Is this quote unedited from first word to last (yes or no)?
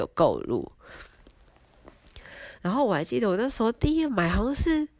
no